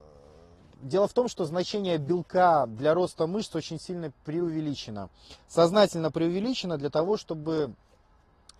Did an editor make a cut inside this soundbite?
no; 0 cuts

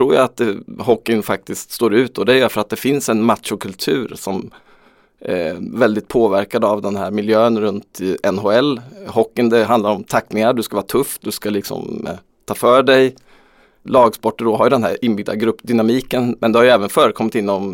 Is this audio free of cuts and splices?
no; 1 cut; at 11.2 s

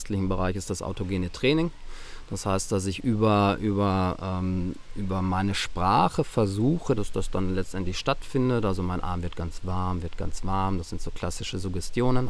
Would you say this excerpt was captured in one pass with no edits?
no; 1 cut; at 7.0 s

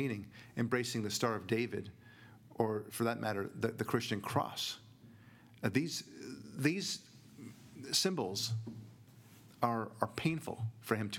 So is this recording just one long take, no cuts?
yes; 0 cuts

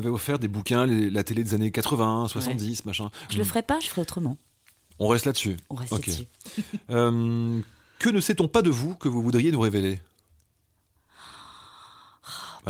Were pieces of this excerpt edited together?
yes; 1 cut; at 3.3 s

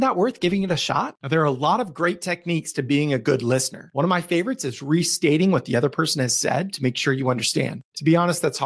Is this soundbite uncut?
no; 1 cut; at 1.2 s

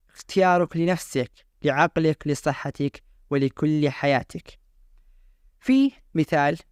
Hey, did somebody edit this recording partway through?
no; 0 cuts

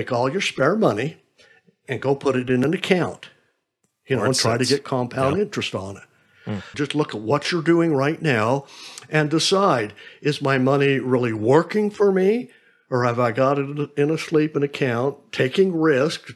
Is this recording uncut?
no; 1 cut; at 6.7 s

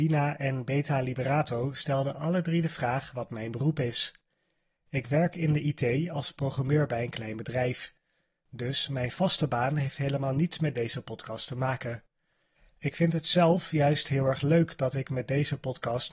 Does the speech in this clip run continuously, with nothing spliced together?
yes; 0 cuts

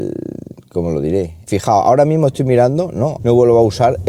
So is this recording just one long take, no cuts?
no; 2 cuts; at 1.5 s, 3.2 s

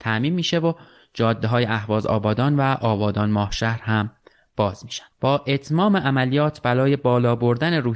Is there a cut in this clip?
yes; 1 cut; at 5.1 s

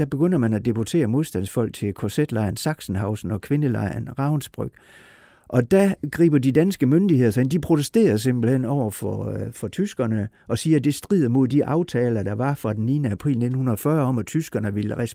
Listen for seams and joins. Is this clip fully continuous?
yes; 0 cuts

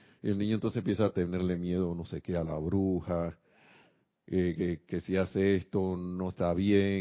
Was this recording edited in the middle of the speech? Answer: no; 0 cuts

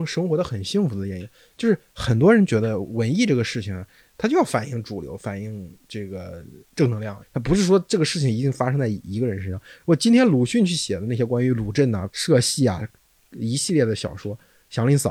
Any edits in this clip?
yes; 2 cuts; at 7.2 s, 12.1 s

